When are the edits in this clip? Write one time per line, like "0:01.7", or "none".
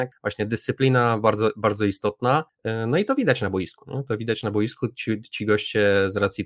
none